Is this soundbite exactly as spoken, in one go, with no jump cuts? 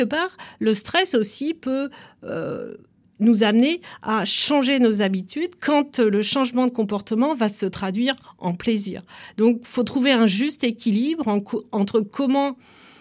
yes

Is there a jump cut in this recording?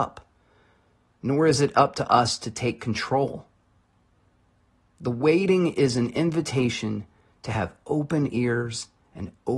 no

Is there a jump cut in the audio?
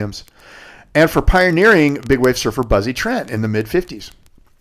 no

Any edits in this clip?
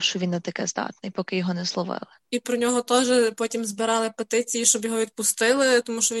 no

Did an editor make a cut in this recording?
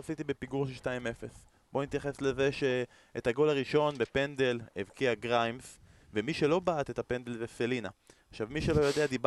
no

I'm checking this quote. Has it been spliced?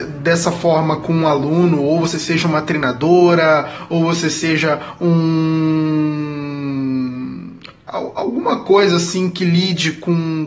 no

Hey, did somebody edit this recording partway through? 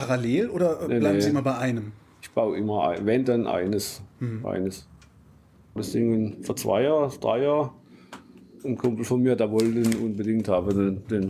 yes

